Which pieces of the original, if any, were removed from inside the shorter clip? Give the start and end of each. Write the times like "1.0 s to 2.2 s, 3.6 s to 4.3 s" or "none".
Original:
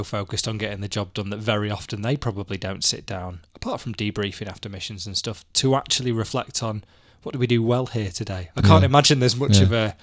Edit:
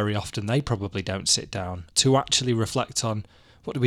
3.4 s to 5.5 s